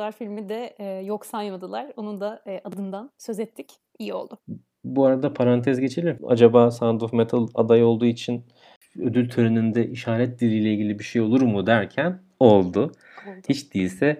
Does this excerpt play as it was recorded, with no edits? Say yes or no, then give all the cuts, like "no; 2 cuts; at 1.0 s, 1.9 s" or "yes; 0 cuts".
no; 1 cut; at 6.2 s